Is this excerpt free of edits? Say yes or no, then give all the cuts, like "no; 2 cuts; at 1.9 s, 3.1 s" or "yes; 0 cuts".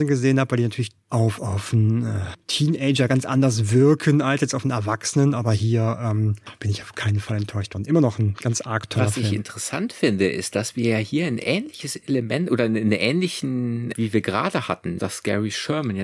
no; 2 cuts; at 13.9 s, 15.0 s